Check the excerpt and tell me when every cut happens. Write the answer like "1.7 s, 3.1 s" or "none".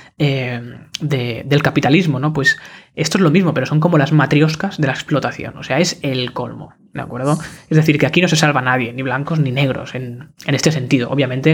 none